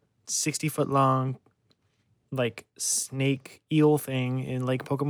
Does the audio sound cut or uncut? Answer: uncut